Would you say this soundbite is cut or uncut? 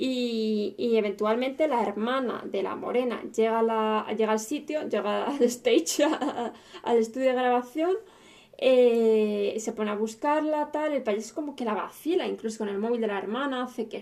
uncut